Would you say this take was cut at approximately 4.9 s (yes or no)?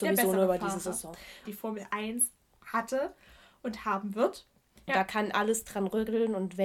yes